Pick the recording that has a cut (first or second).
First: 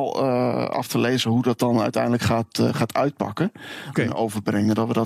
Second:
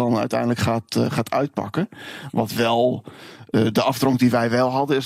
first